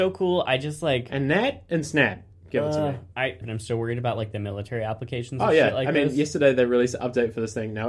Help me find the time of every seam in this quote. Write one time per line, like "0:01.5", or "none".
0:03.4